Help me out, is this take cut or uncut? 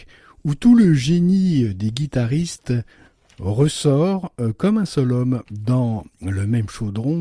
cut